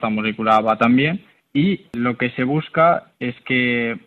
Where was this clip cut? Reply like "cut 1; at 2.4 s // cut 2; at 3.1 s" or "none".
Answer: none